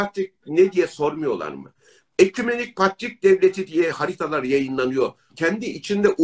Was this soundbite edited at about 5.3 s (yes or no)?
yes